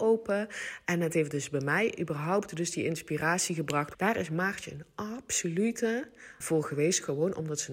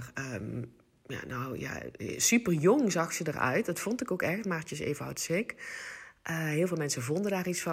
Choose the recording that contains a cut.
first; 2 cuts; at 3.9 s, 6.4 s

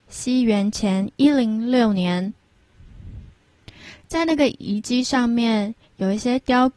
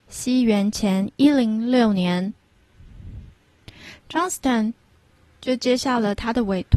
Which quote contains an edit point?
second; 1 cut; at 4.0 s

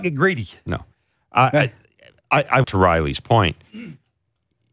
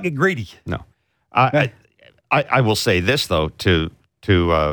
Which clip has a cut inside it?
first; 1 cut; at 2.6 s

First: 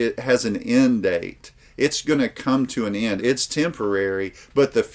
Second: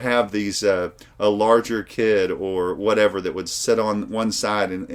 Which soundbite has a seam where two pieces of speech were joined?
first; 1 cut; at 3.2 s

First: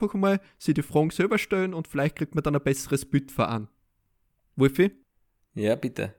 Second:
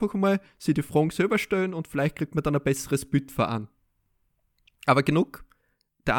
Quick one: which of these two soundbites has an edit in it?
first; 1 cut; at 4.5 s

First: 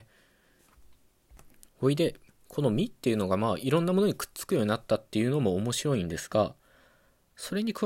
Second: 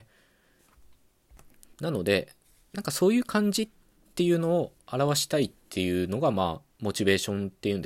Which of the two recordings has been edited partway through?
first; 1 cut; at 1.7 s

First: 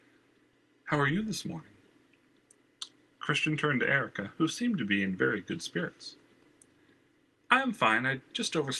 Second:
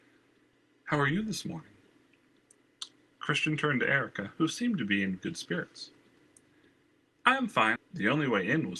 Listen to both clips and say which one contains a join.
second; 2 cuts; at 5.2 s, 7.8 s

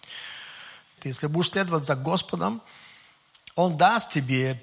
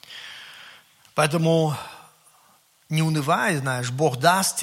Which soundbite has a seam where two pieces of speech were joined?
first; 1 cut; at 1.0 s

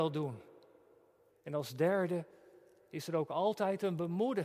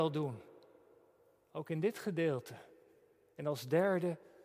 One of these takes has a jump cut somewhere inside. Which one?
first; 1 cut; at 1.3 s

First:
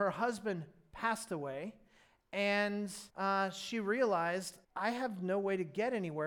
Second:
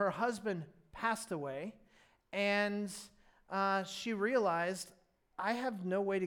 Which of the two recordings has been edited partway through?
first; 2 cuts; at 3.1 s, 4.6 s

